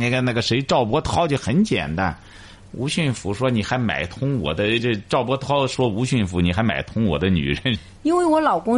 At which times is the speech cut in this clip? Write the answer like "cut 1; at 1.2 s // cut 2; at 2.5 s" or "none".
cut 1; at 4.8 s // cut 2; at 7.8 s